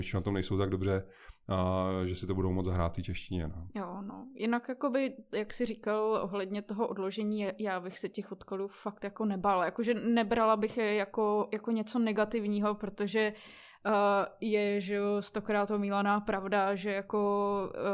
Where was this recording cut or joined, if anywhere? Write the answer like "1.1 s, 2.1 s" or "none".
none